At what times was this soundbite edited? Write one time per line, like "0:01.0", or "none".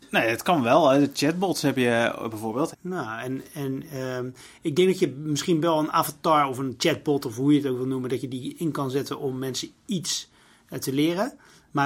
0:02.7